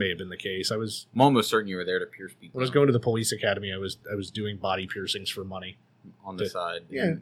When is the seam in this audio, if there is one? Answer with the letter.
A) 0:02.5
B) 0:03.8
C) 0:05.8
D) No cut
D